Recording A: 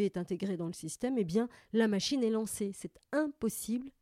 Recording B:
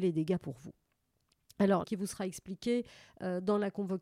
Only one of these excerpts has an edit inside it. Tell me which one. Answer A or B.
B